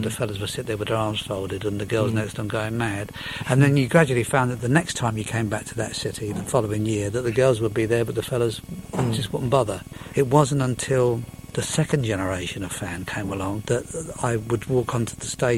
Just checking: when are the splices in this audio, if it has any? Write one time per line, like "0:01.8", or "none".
0:10.1
0:13.6